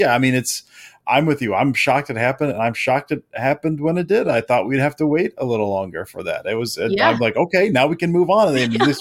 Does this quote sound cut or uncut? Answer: uncut